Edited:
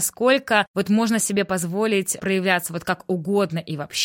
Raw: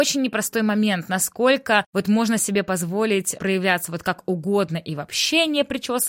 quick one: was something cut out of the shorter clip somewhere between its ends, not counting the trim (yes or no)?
no